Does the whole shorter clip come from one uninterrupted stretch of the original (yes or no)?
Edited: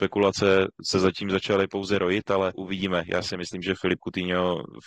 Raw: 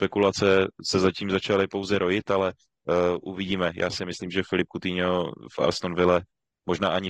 no